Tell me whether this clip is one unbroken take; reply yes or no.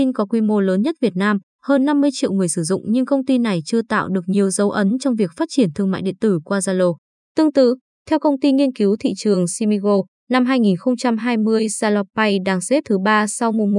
yes